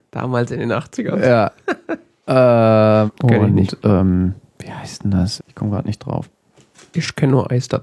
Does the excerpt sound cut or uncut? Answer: cut